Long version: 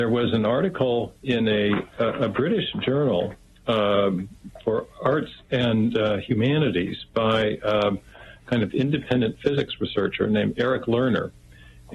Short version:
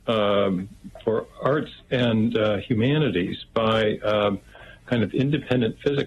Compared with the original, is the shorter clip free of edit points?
yes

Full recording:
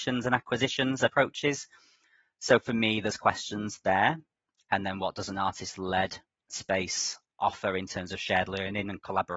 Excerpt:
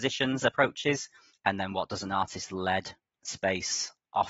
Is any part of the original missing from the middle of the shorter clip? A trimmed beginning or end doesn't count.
yes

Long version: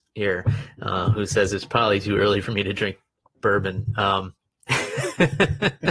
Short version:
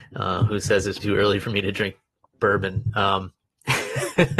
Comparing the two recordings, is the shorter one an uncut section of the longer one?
no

